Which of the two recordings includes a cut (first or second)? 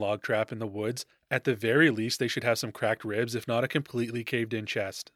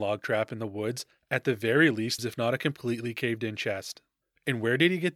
second